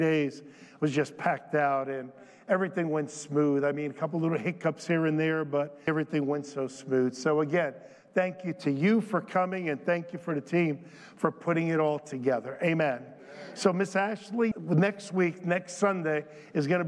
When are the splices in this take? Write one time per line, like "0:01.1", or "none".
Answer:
0:05.9
0:14.5